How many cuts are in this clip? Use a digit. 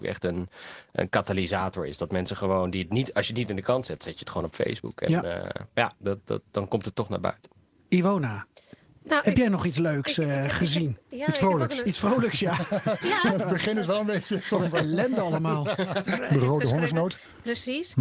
1